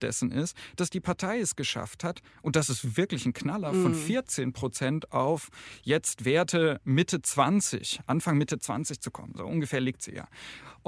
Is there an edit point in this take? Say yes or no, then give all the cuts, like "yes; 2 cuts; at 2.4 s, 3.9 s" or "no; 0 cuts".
no; 0 cuts